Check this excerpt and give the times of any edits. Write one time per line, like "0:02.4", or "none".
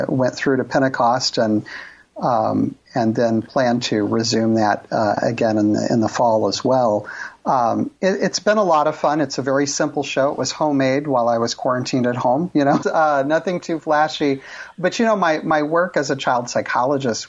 0:12.8